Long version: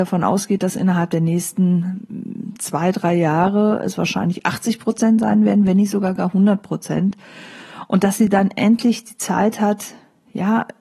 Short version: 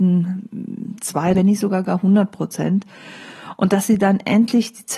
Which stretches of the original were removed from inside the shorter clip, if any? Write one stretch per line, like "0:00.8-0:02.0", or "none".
0:02.9-0:05.7